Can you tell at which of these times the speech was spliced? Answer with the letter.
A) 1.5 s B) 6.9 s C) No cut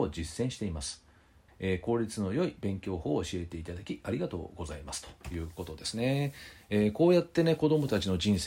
A